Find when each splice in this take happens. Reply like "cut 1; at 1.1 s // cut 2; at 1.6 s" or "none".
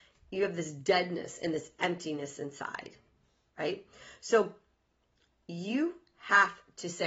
none